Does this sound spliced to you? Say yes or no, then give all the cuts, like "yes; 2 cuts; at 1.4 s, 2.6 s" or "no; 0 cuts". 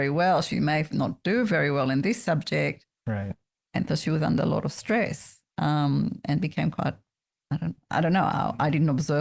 no; 0 cuts